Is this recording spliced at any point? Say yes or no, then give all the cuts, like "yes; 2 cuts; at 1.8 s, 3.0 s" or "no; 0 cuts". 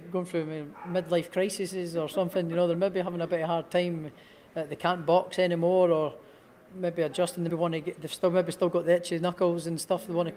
yes; 1 cut; at 7.5 s